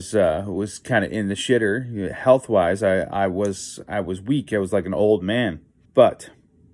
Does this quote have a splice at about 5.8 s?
yes; 1 cut; at 5.8 s

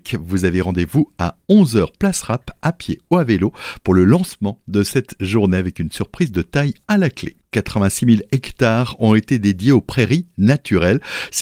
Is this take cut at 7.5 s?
yes; 1 cut; at 7.5 s

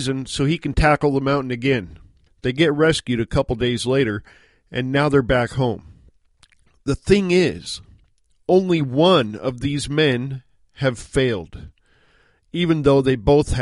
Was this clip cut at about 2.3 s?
yes; 1 cut; at 2.3 s

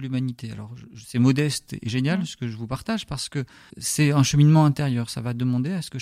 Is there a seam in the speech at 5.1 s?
no; 1 cut; at 3.7 s

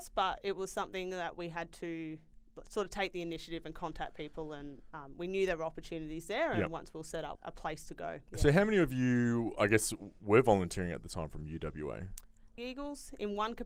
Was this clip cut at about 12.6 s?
yes; 2 cuts; at 7.4 s, 12.6 s

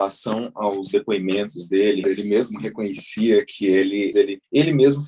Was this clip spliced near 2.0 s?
yes; 2 cuts; at 2.0 s, 4.1 s

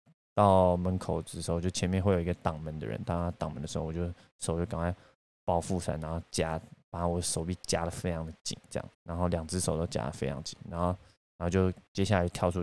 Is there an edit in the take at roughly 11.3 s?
no; 1 cut; at 8.9 s

